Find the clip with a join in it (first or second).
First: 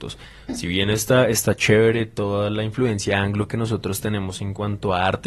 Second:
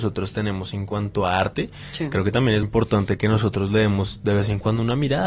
second